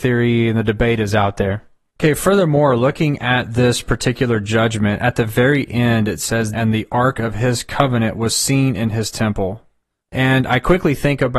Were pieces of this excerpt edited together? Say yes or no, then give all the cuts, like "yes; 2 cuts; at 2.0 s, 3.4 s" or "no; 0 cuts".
yes; 1 cut; at 6.5 s